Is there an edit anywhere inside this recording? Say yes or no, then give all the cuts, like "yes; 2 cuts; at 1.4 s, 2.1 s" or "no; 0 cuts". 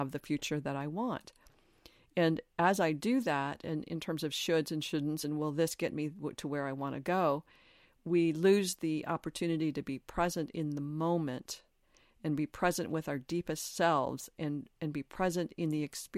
no; 0 cuts